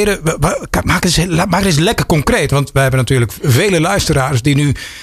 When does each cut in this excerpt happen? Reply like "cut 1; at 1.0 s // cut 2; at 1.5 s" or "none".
none